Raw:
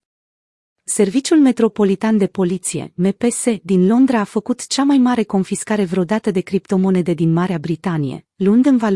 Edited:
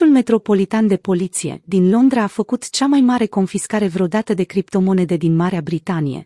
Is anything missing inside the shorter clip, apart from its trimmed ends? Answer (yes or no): yes